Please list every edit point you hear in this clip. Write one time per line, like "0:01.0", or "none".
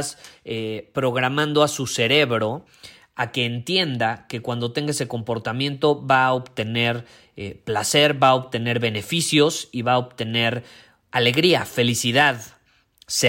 none